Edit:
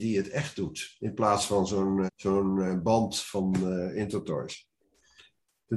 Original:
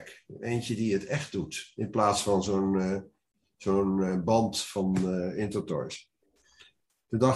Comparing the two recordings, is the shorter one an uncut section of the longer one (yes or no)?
no